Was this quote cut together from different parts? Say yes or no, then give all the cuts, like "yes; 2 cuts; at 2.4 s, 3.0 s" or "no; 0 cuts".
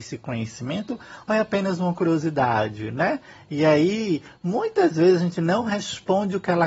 no; 0 cuts